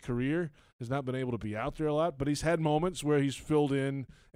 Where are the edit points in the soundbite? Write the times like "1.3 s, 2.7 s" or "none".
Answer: none